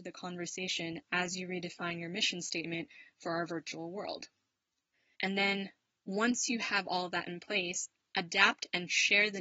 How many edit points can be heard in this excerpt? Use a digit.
1